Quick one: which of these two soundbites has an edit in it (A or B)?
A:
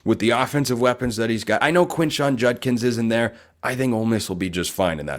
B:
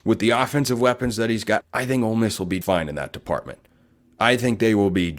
B